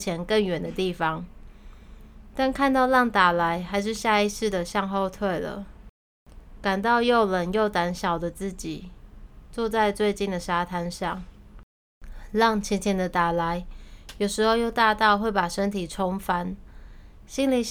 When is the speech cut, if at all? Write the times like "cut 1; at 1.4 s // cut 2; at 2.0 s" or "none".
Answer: none

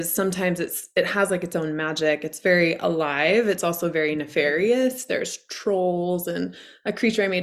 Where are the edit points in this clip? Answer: none

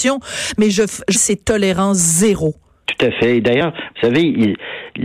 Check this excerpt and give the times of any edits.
cut 1; at 1.1 s // cut 2; at 2.8 s

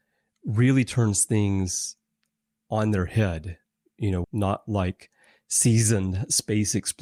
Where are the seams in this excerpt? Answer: cut 1; at 4.2 s

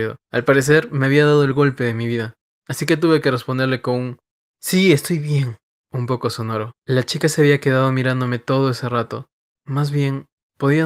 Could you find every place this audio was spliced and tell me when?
cut 1; at 2.5 s // cut 2; at 9.6 s

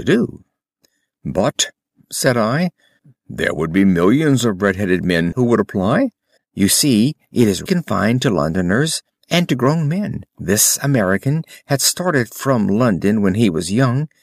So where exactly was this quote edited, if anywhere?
cut 1; at 6.4 s // cut 2; at 7.7 s // cut 3; at 10.3 s

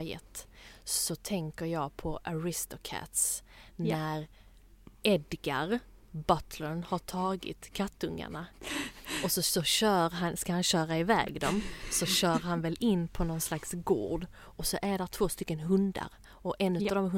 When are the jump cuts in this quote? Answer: none

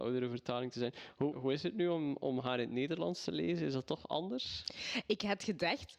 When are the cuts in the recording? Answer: cut 1; at 1.3 s

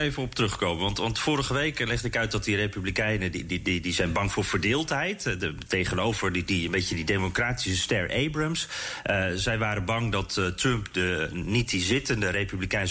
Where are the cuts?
none

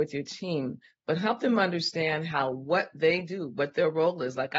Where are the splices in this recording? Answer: none

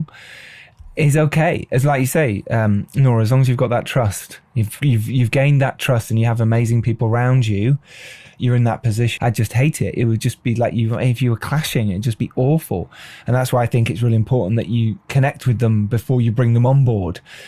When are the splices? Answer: cut 1; at 9.2 s

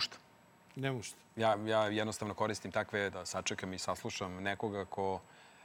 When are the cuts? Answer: cut 1; at 3.1 s

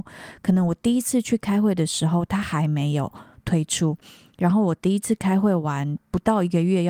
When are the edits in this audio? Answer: none

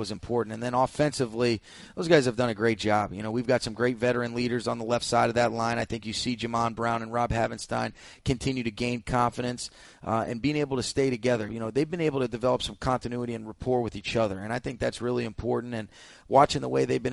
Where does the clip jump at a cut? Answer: cut 1; at 11.5 s

